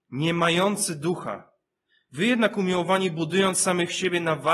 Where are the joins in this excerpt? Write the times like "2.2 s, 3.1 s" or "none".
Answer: none